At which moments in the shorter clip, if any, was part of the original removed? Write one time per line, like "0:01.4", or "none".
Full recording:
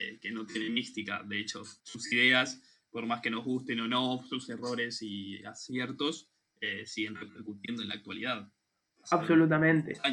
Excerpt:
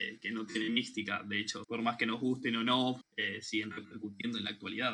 0:01.6
0:03.0